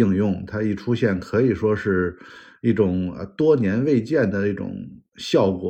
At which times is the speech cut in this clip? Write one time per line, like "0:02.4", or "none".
none